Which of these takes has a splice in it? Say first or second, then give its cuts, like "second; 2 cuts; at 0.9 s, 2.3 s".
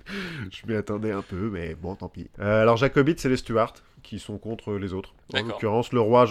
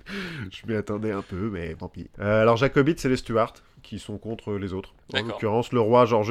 second; 1 cut; at 1.8 s